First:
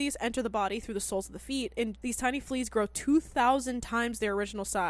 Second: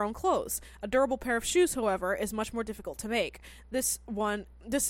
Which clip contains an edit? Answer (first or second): first